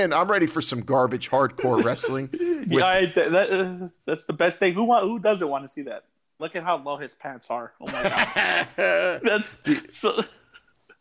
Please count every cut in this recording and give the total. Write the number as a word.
one